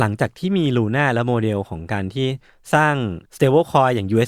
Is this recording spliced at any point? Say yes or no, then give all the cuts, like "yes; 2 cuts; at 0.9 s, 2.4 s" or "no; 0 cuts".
yes; 1 cut; at 3.3 s